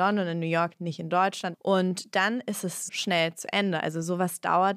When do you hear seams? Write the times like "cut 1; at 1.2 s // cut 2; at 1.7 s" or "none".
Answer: cut 1; at 1.5 s // cut 2; at 2.9 s